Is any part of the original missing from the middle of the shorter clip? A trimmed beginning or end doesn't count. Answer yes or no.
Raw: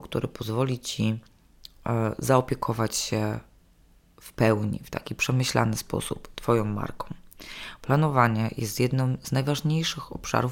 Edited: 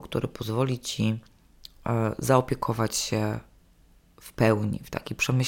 no